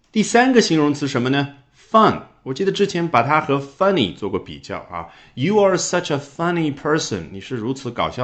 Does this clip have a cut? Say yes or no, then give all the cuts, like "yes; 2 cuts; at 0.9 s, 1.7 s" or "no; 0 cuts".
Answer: no; 0 cuts